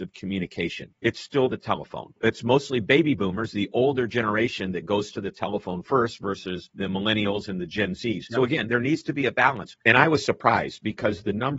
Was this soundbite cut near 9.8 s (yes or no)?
yes